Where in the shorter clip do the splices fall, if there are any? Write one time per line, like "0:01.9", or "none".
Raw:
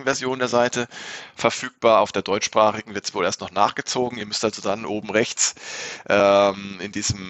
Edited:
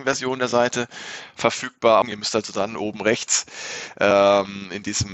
0:02.0